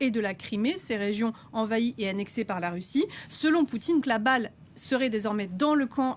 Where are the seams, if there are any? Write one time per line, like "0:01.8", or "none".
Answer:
0:04.0